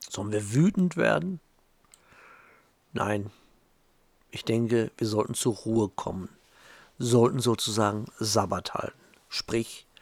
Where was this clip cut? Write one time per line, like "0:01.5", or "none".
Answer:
none